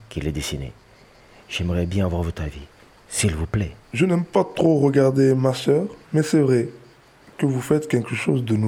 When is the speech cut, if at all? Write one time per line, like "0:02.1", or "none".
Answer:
0:03.8
0:06.0